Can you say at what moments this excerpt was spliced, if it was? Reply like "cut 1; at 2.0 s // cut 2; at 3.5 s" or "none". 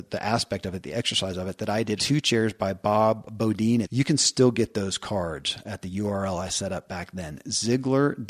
cut 1; at 2.0 s // cut 2; at 3.8 s